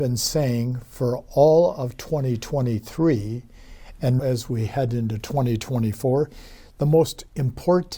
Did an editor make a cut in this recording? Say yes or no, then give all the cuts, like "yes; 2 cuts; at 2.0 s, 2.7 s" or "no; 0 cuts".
yes; 1 cut; at 4.2 s